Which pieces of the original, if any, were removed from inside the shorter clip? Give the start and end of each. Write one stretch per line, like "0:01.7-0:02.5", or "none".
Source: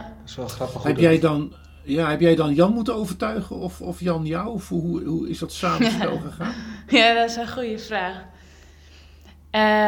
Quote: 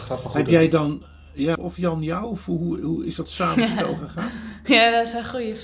0:02.1-0:03.8